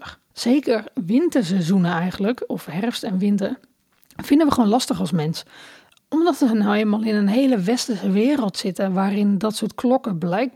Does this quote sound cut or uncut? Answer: uncut